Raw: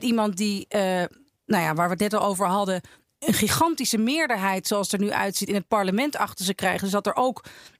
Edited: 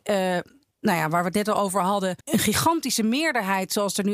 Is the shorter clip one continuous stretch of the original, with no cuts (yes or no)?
no